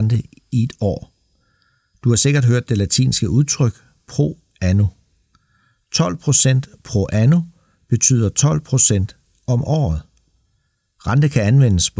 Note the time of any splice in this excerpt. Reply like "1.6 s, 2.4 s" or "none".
none